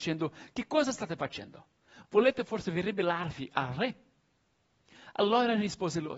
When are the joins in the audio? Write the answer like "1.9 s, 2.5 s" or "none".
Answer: none